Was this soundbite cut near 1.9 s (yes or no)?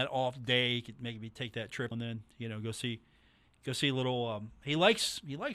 yes